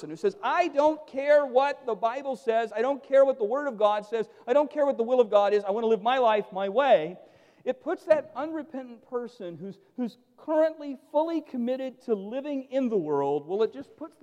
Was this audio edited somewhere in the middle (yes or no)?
no